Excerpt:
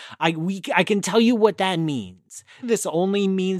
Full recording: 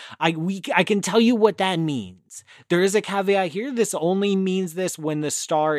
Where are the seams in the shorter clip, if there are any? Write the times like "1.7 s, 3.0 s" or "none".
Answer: 2.6 s